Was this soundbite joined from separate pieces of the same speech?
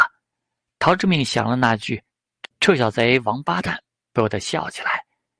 no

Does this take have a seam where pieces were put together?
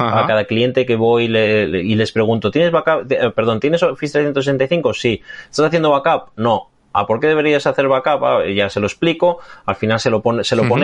no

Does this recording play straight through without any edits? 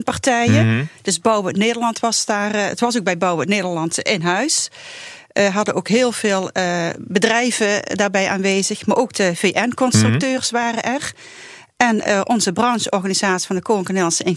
yes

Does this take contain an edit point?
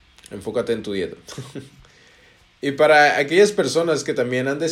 no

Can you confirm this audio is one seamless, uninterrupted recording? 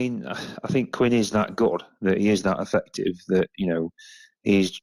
yes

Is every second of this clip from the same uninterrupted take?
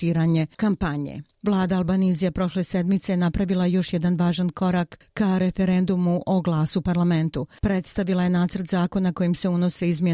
no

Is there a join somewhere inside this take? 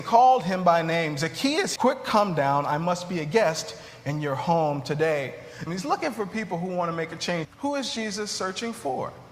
yes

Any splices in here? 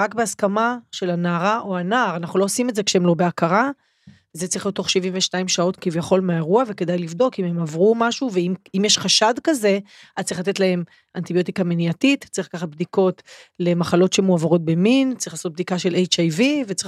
yes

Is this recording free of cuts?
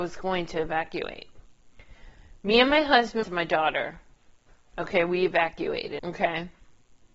no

